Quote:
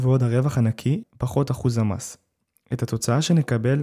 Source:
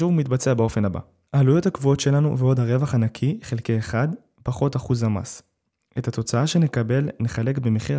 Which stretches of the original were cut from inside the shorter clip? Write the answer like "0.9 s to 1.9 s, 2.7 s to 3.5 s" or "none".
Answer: 3.4 s to 4.3 s